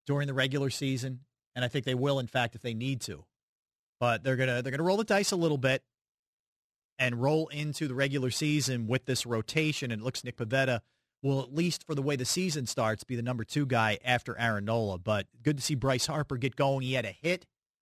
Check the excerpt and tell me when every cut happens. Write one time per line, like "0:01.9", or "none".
0:10.2